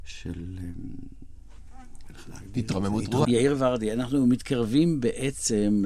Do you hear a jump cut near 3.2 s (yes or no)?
yes